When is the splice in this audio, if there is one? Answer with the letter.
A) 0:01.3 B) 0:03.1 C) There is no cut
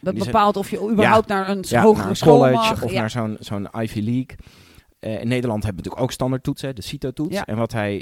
C